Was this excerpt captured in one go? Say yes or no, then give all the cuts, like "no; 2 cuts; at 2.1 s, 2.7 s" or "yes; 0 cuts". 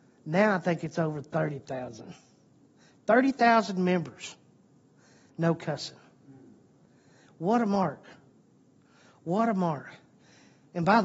yes; 0 cuts